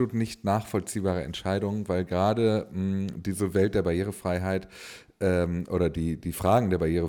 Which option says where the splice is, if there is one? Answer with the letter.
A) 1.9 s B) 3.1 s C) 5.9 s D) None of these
D